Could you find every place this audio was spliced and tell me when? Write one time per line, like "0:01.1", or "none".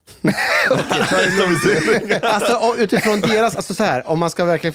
none